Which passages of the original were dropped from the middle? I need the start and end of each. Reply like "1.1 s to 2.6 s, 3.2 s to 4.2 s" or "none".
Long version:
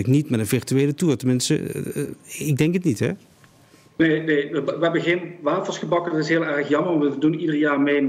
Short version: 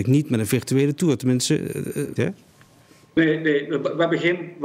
2.2 s to 3.0 s

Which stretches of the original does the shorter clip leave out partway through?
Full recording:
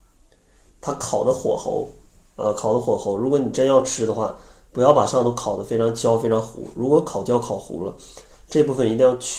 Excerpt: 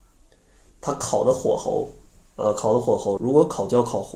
3.2 s to 6.7 s

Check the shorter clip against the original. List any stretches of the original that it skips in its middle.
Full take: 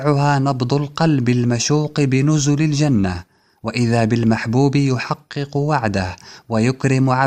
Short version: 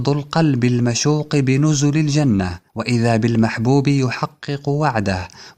3.3 s to 3.6 s

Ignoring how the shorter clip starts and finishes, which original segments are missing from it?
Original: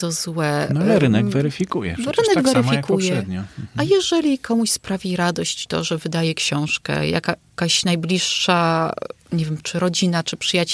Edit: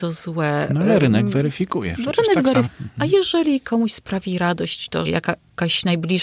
2.6 s to 3.4 s, 5.8 s to 7.0 s

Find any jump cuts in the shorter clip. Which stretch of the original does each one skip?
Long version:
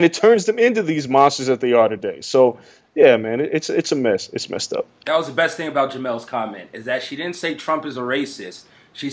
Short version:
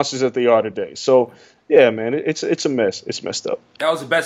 none

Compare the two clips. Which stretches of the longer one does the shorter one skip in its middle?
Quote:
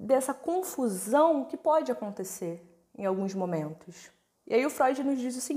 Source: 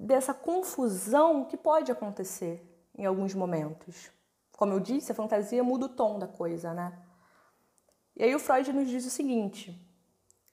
4.3 s to 8.0 s

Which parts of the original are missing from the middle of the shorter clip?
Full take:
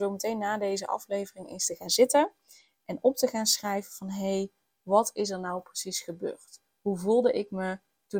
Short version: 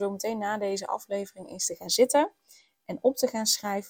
none

